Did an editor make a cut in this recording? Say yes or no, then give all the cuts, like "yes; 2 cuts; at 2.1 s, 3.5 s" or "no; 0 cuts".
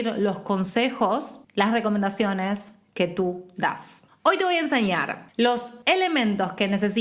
no; 0 cuts